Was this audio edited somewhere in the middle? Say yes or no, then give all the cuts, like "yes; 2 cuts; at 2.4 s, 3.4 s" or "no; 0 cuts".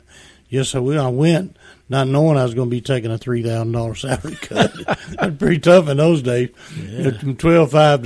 no; 0 cuts